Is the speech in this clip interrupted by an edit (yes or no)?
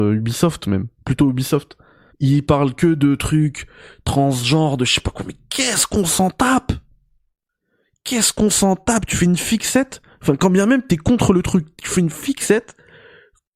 yes